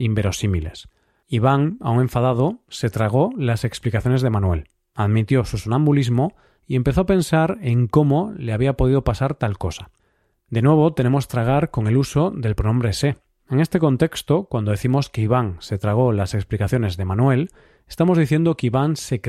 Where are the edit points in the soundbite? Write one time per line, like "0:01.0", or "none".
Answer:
0:01.2